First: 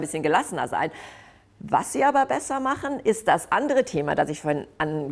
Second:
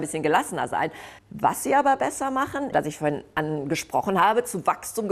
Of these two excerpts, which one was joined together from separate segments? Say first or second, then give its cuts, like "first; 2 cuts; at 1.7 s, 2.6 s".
second; 2 cuts; at 1.2 s, 2.7 s